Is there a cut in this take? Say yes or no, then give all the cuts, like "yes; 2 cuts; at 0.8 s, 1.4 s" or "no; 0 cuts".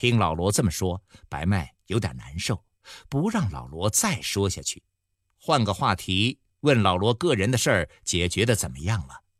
no; 0 cuts